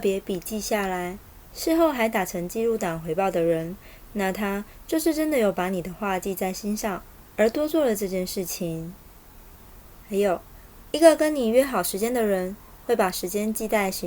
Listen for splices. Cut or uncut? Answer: uncut